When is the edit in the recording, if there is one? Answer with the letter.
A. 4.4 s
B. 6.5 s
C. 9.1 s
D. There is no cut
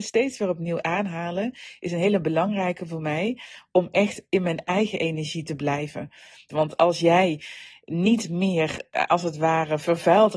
B